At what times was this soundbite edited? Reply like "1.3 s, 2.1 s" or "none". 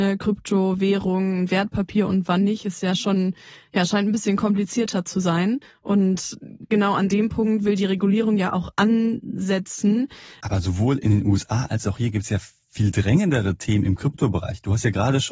10.4 s